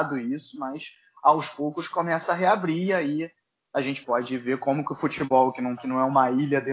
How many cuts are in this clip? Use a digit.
2